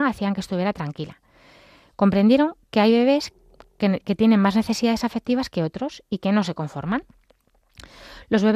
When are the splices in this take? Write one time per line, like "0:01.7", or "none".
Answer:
none